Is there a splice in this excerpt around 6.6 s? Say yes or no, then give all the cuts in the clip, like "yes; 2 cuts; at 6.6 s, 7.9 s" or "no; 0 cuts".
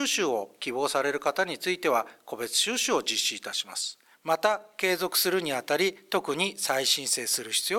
no; 1 cut; at 4.1 s